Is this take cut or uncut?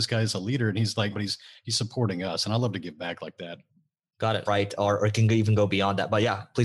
cut